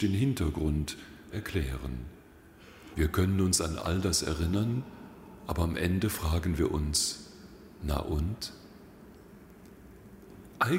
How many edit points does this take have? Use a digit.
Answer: 2